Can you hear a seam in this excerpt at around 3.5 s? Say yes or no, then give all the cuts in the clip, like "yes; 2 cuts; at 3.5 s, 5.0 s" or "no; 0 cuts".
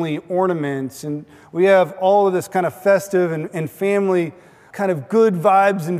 no; 1 cut; at 4.7 s